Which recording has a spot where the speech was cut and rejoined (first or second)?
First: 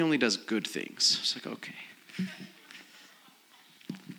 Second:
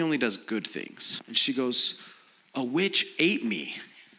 second